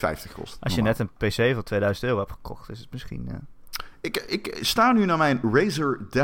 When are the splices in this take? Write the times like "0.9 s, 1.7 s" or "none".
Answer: none